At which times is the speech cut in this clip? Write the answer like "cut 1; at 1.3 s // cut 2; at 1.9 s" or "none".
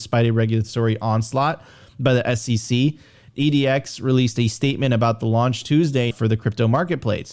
cut 1; at 3.3 s // cut 2; at 6.1 s